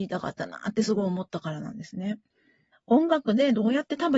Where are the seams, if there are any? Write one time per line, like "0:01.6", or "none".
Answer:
0:02.7